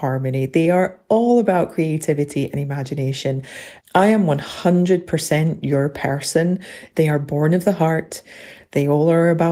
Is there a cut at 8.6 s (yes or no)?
no